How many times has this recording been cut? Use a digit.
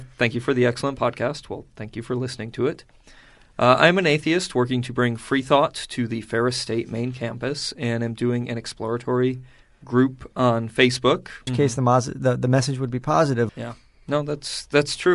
2